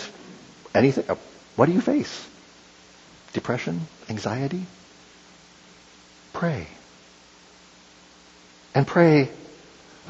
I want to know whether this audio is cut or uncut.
uncut